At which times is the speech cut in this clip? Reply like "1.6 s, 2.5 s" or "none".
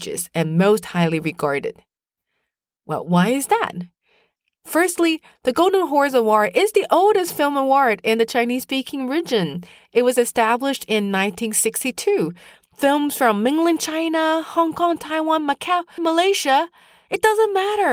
12.5 s, 16.0 s